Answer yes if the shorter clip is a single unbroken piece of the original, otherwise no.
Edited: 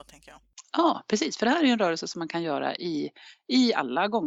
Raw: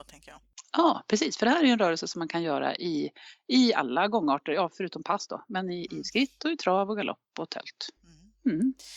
yes